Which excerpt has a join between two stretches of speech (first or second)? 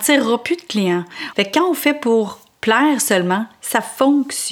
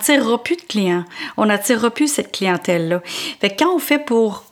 first